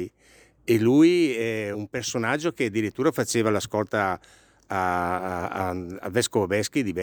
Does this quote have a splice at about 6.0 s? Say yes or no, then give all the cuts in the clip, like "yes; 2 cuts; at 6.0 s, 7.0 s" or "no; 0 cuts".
no; 1 cut; at 1.7 s